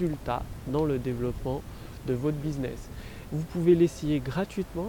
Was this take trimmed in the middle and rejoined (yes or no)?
yes